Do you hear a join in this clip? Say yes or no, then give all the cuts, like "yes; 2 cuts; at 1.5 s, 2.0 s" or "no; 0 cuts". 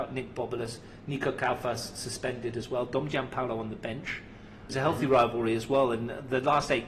yes; 1 cut; at 4.7 s